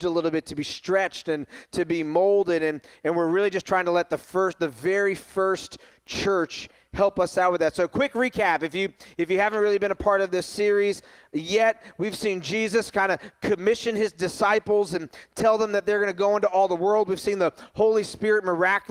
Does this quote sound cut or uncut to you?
uncut